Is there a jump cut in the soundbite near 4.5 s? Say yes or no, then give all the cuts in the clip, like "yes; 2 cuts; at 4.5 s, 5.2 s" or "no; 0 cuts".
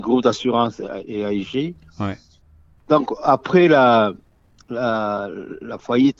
no; 1 cut; at 2.8 s